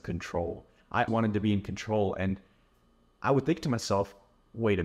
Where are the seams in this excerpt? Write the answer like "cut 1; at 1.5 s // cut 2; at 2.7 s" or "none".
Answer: cut 1; at 1.1 s